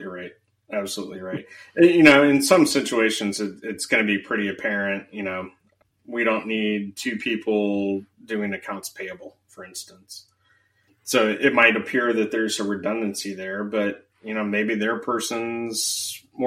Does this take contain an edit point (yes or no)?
no